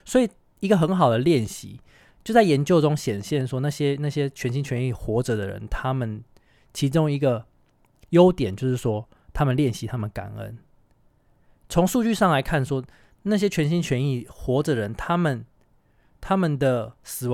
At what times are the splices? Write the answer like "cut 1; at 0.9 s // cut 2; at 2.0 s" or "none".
none